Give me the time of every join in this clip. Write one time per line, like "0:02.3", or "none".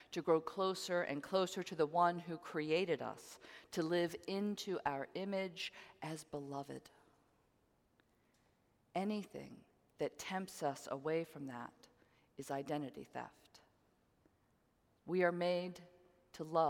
0:15.0